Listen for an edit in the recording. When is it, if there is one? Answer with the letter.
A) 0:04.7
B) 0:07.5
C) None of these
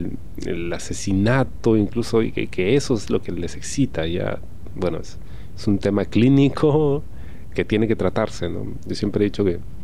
B